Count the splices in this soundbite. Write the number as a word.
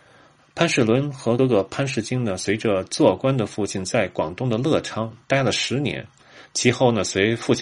one